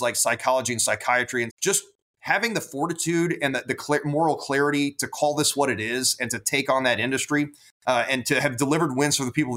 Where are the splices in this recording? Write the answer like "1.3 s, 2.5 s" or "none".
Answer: 1.5 s